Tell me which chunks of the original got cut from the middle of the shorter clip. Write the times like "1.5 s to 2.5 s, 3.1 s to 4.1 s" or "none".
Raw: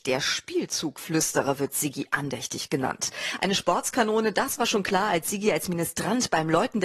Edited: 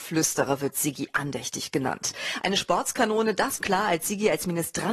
4.6 s to 4.8 s